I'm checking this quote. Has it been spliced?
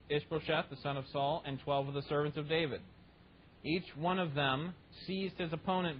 no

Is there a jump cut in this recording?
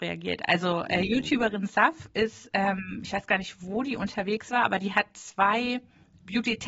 no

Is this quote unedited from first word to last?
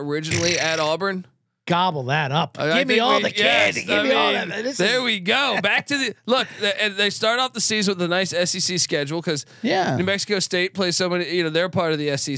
yes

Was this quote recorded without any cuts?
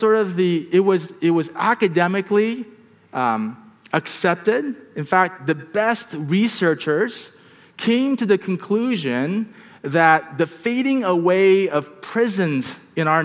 yes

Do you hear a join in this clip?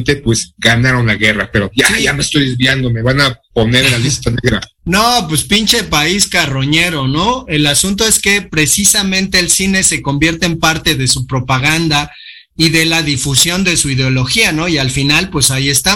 no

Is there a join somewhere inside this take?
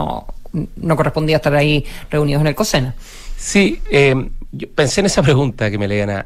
yes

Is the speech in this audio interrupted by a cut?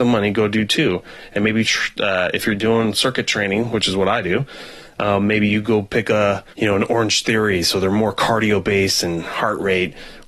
yes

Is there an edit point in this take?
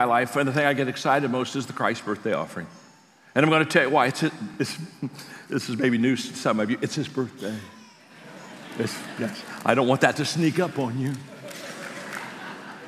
no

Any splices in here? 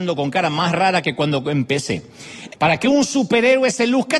yes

